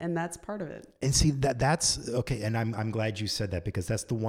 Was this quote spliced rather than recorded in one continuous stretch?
no; 0 cuts

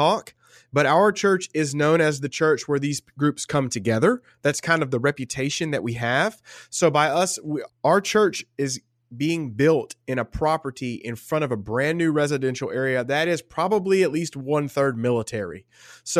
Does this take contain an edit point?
yes; 1 cut; at 7.7 s

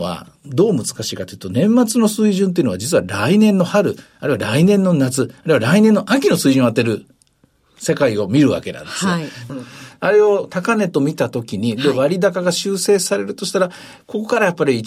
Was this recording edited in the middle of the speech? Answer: yes; 1 cut; at 9.5 s

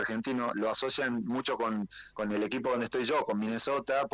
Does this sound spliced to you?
no; 0 cuts

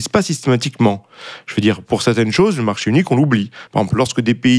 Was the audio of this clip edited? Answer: no; 0 cuts

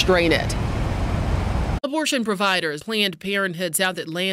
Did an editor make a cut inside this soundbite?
yes; 1 cut; at 2.8 s

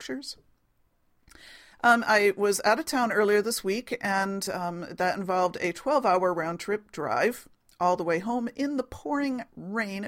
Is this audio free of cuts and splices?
yes; 0 cuts

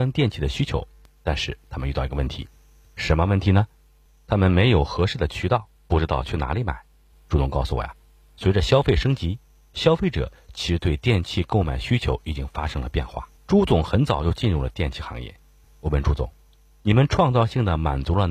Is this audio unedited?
no; 3 cuts; at 7.1 s, 13.4 s, 15.7 s

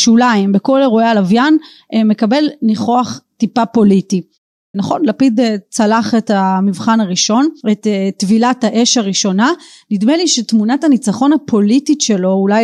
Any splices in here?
yes; 2 cuts; at 4.7 s, 7.6 s

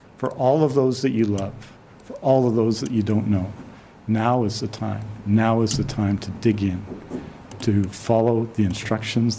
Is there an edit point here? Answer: no; 0 cuts

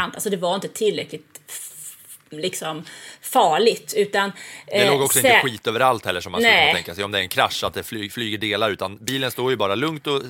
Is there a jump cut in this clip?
no; 0 cuts

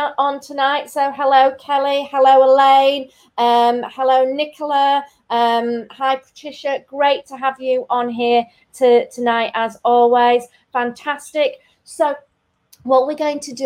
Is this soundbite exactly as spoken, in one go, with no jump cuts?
yes; 0 cuts

